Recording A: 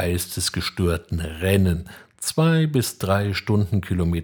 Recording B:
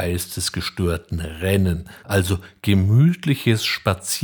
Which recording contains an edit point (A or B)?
B